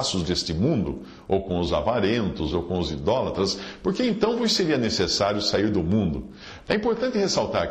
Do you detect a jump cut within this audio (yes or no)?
yes